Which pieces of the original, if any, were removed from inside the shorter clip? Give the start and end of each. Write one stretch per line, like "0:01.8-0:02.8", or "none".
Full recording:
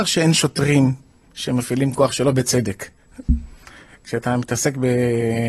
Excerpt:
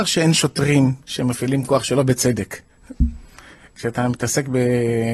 0:01.0-0:01.3